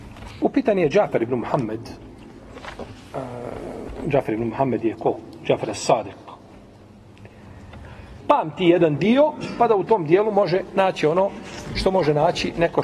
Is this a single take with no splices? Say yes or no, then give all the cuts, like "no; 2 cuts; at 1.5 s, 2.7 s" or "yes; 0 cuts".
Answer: no; 1 cut; at 8.2 s